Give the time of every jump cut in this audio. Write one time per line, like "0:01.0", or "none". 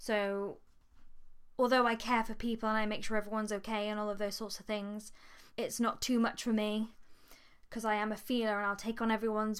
0:05.5